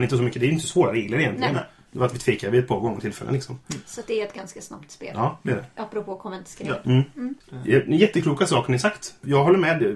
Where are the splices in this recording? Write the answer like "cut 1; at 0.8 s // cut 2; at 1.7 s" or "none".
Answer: cut 1; at 7.4 s